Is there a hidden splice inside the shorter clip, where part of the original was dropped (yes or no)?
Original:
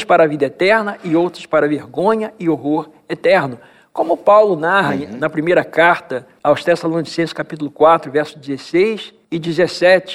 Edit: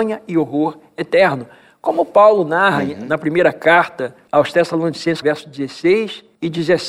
yes